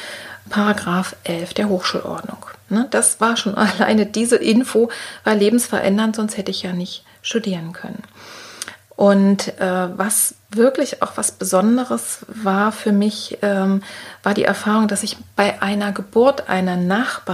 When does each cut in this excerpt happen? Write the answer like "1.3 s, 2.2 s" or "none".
none